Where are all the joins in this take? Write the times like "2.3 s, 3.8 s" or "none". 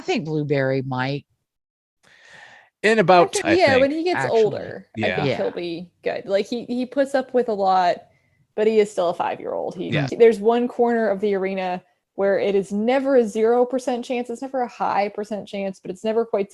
3.4 s, 10.1 s